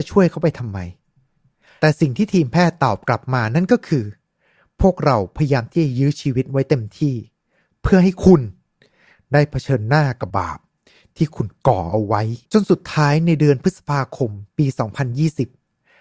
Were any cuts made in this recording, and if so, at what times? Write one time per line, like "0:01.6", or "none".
0:10.3
0:12.4